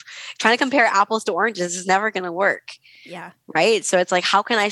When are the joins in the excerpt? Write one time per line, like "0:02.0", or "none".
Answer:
none